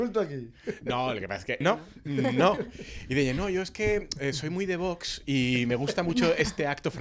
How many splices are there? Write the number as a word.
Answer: one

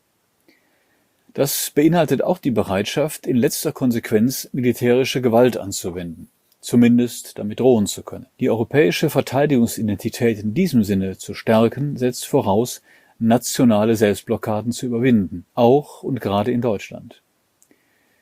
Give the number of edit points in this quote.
two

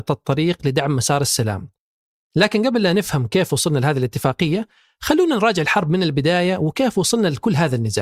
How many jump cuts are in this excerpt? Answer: one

